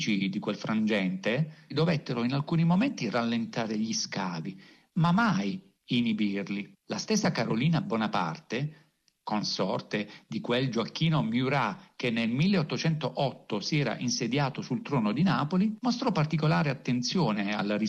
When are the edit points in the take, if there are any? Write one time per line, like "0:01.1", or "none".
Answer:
none